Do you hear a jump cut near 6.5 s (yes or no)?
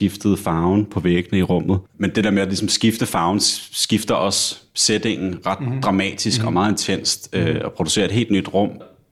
no